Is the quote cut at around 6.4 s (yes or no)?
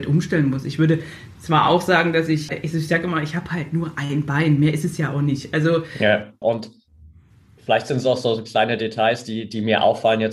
yes